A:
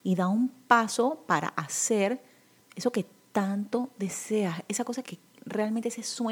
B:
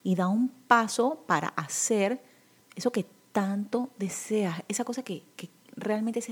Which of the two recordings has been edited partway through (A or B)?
A